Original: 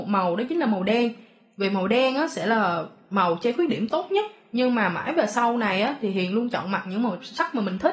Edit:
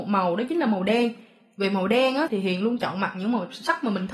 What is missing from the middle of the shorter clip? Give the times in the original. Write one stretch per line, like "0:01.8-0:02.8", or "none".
0:02.3-0:06.0